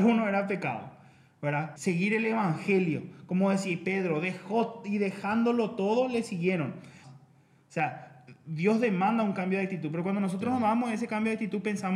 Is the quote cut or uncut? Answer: cut